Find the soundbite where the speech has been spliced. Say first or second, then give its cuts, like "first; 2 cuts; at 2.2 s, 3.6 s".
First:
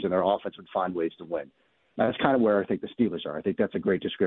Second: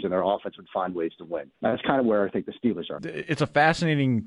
second; 2 cuts; at 1.5 s, 3.0 s